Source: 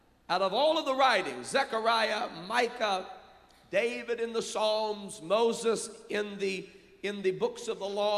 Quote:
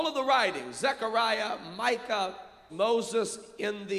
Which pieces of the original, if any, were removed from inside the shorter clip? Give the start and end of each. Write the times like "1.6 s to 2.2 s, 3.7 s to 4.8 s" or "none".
3.4 s to 5.2 s